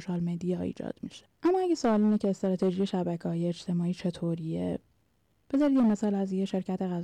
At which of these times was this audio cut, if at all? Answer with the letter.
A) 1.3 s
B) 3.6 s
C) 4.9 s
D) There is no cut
A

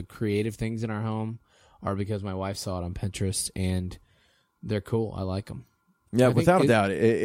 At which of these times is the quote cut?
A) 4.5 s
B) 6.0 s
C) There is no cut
C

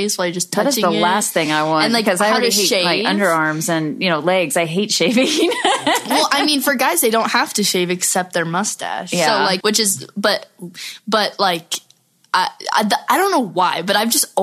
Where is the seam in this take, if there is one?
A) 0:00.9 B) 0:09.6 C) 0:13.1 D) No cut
B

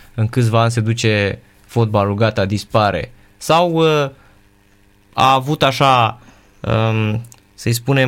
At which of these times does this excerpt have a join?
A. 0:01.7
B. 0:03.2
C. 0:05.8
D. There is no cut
D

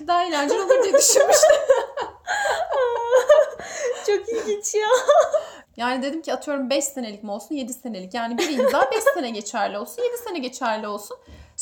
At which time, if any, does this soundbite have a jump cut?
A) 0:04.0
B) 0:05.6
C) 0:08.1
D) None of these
B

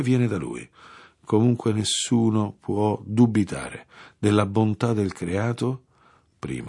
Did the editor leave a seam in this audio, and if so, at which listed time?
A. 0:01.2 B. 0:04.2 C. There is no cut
C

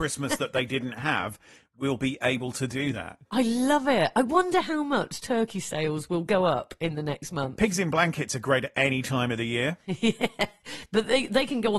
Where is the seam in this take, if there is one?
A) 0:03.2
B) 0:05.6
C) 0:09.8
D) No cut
D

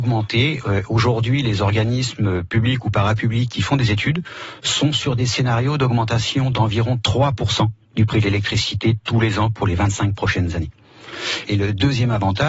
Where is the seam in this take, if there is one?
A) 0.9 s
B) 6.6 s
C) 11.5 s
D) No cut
C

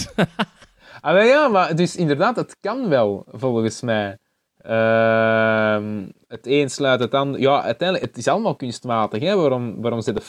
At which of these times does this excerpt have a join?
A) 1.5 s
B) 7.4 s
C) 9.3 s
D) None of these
D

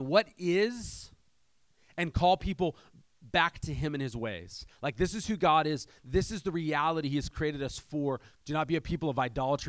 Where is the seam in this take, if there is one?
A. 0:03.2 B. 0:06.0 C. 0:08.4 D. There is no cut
C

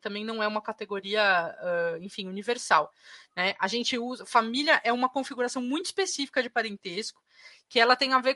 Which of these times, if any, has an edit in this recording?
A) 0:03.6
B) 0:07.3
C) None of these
C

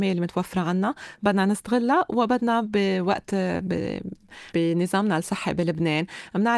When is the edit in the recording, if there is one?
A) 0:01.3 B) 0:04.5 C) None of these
B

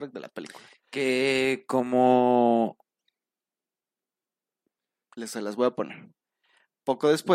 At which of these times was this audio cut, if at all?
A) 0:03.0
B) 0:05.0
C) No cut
B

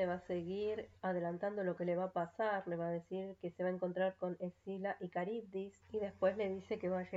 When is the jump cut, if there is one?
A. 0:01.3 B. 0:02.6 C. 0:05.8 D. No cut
C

